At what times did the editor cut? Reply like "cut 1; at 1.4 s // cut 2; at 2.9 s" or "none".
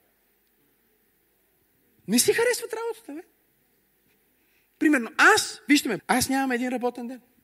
cut 1; at 6.0 s